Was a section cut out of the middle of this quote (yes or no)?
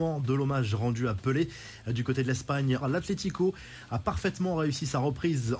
yes